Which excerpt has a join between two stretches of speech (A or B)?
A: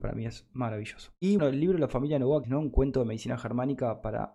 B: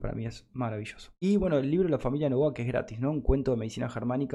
A